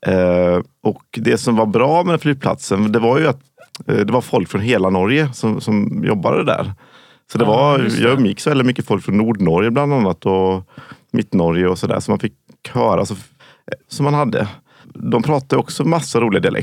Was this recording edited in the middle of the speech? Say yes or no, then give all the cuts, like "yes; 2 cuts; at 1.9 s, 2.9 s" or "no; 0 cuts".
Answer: yes; 1 cut; at 13.9 s